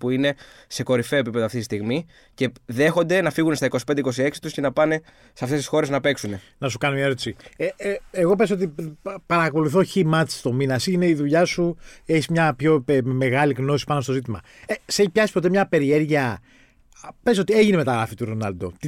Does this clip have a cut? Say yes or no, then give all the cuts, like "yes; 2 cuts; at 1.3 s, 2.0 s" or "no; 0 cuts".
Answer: no; 0 cuts